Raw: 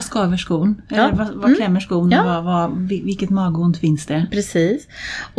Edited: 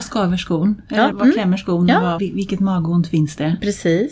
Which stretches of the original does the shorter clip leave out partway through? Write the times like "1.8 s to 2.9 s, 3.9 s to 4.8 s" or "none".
1.1 s to 1.3 s, 2.4 s to 2.9 s